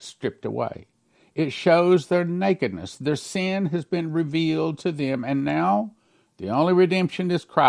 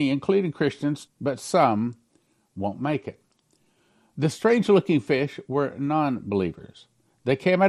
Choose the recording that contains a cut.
second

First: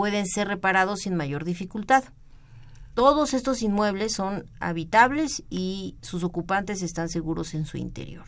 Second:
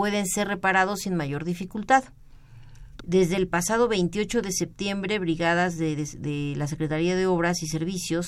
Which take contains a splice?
second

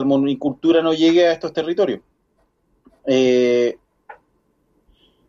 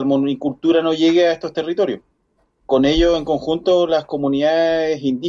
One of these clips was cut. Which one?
second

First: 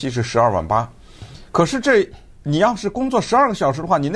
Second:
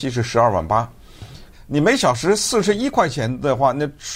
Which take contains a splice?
second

